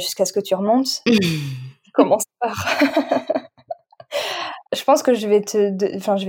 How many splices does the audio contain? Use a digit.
1